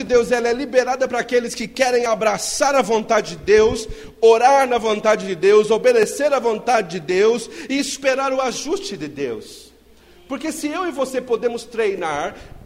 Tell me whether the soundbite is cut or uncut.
uncut